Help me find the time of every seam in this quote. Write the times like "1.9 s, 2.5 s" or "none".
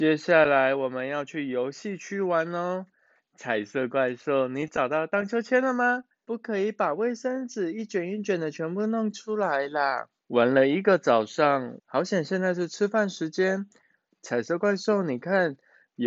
6.2 s, 10.2 s, 11.8 s